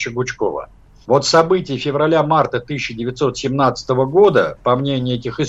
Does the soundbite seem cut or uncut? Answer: cut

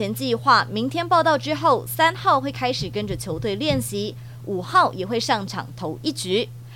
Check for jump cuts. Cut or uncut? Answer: uncut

